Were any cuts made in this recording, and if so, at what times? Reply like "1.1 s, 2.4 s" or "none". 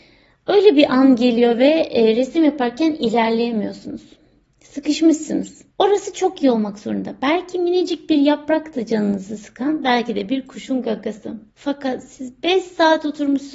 5.7 s, 11.5 s